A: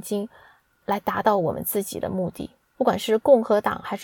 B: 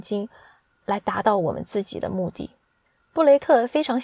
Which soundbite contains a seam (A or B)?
A